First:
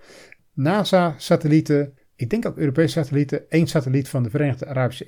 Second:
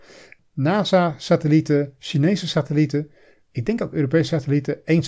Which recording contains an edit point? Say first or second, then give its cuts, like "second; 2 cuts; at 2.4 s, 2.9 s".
first; 1 cut; at 2.0 s